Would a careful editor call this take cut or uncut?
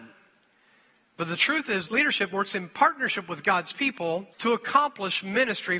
cut